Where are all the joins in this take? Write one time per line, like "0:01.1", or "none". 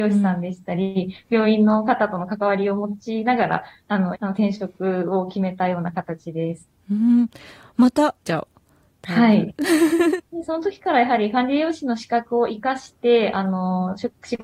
0:04.1
0:08.2
0:10.2